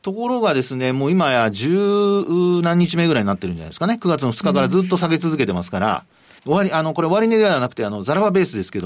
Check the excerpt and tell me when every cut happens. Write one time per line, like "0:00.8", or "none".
0:06.4